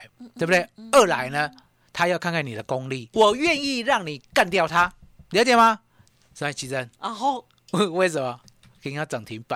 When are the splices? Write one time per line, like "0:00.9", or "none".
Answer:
0:03.1
0:07.0